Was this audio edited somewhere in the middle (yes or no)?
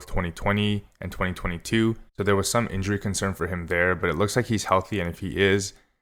yes